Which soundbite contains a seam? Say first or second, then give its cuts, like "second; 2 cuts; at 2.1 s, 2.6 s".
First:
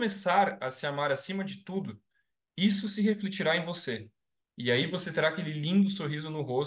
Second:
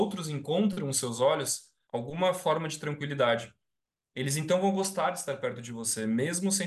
second; 1 cut; at 1.8 s